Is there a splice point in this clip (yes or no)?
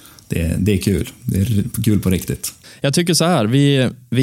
no